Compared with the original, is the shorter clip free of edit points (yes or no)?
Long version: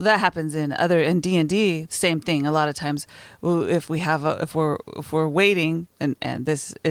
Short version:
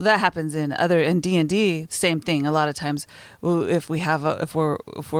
yes